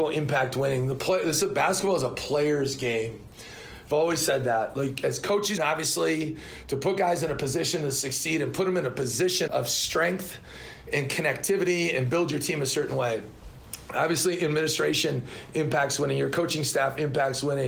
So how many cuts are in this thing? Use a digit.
2